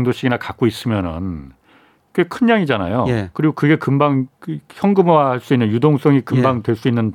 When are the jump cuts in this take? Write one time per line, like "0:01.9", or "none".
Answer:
none